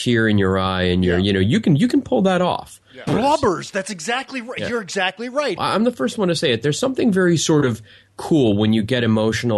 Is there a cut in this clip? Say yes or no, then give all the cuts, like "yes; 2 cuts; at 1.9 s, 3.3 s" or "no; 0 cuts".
yes; 2 cuts; at 3.1 s, 5.6 s